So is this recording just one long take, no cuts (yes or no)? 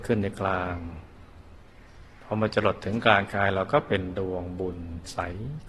yes